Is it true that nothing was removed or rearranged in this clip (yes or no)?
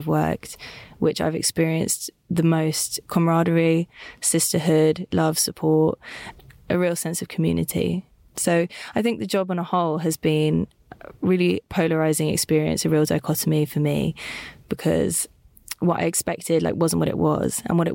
no